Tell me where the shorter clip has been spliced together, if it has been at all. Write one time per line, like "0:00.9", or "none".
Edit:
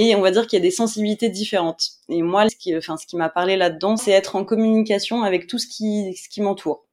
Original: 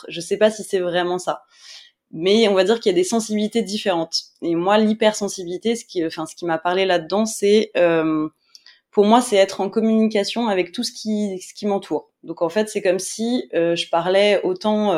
0:02.5
0:04.0